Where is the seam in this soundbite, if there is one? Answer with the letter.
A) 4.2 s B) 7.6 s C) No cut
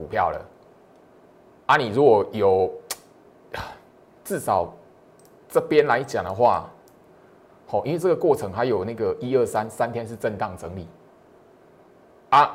A